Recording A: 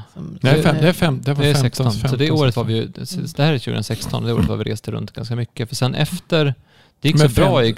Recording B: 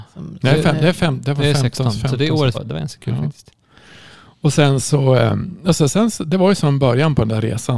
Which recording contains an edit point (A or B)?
B